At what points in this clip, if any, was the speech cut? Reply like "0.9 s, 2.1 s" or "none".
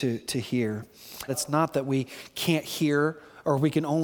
1.3 s

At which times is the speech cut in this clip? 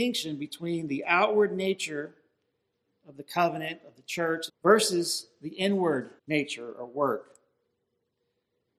4.5 s, 6.2 s

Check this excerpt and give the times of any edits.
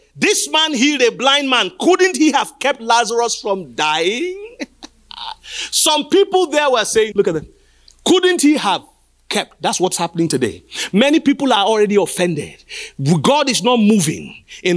7.1 s

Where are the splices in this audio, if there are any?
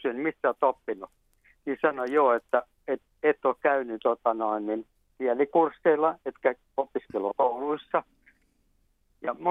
none

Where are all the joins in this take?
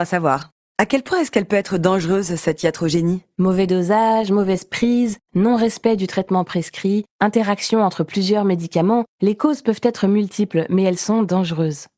none

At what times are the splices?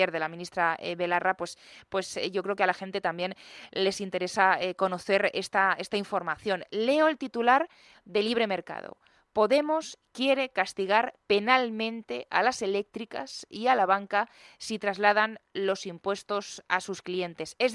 none

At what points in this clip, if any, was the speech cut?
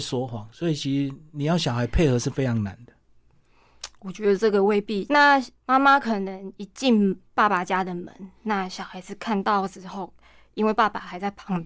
5.1 s

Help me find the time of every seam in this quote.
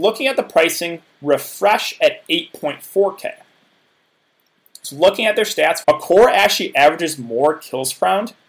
1.1 s, 5.8 s

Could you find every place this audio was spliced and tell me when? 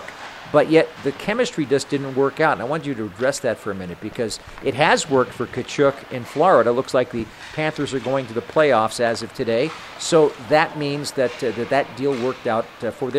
1.0 s

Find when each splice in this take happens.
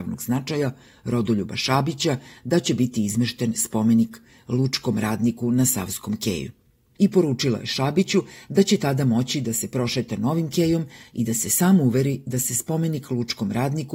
7.0 s

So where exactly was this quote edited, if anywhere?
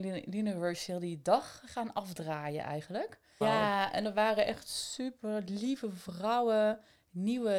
3.4 s

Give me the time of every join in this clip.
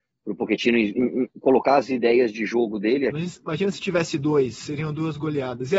3.1 s

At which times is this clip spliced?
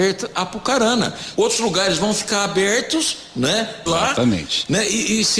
1.4 s, 3.9 s

